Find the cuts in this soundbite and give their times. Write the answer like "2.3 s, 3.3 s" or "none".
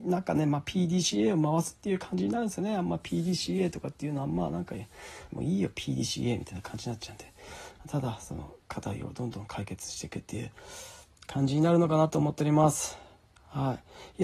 5.3 s